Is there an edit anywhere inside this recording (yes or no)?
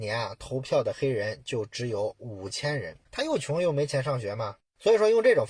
yes